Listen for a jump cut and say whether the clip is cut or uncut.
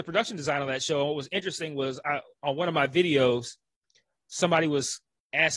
uncut